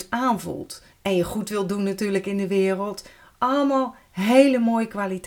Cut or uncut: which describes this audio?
cut